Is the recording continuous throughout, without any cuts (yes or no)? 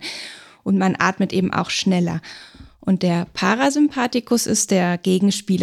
yes